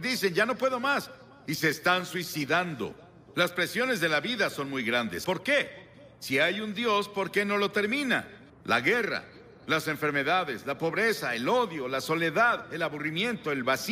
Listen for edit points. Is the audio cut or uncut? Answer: cut